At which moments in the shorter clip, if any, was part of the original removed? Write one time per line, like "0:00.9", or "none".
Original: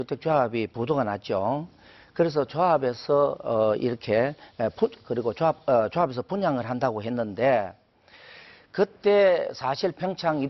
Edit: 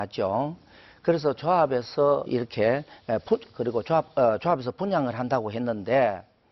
0:02.3